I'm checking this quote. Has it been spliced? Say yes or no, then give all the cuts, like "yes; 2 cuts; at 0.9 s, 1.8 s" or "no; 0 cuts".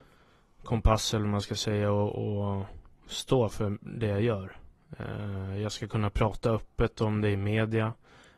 no; 0 cuts